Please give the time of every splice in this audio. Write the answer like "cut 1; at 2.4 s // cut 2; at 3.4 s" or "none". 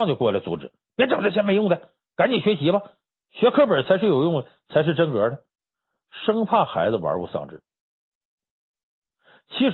none